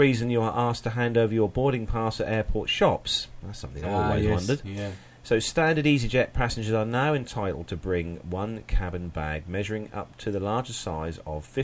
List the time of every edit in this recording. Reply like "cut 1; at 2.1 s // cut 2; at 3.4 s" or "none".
none